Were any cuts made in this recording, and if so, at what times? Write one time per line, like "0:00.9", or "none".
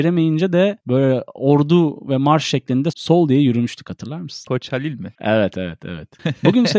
0:02.9